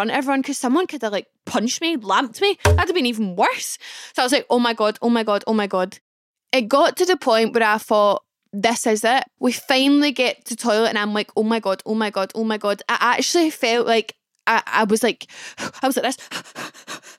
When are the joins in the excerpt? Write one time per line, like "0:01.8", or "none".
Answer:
0:09.4